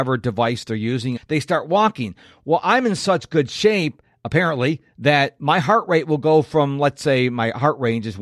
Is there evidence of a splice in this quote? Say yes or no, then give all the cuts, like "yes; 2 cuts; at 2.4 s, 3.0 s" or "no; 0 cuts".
yes; 1 cut; at 1.2 s